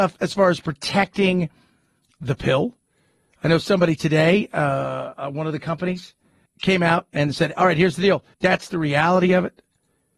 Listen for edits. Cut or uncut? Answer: cut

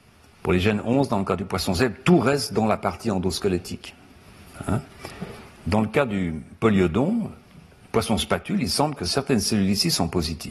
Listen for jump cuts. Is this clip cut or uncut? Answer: uncut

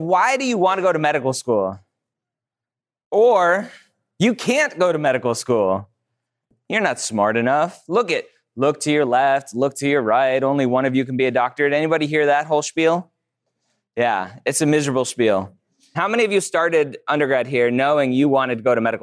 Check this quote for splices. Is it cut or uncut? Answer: cut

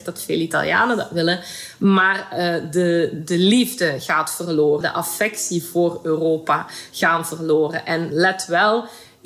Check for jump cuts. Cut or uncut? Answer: cut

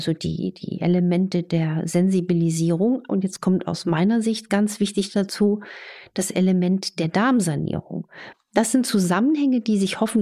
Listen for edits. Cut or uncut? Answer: cut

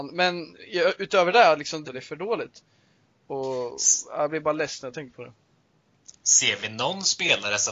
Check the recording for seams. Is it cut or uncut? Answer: cut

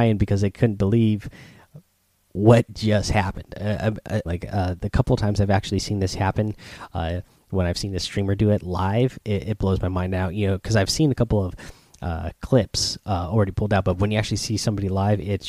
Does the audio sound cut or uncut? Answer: cut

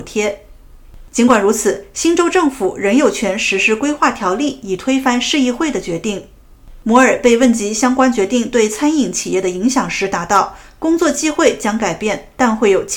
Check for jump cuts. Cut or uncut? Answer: uncut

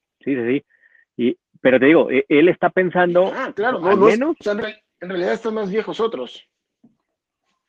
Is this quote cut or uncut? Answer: uncut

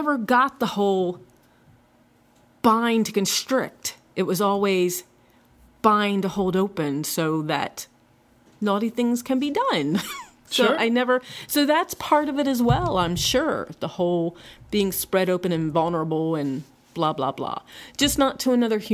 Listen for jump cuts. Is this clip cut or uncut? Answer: uncut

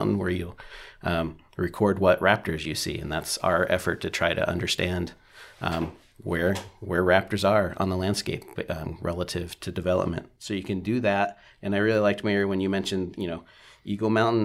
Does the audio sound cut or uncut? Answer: uncut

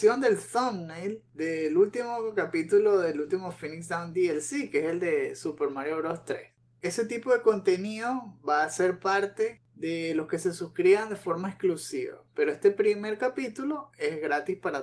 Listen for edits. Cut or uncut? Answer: uncut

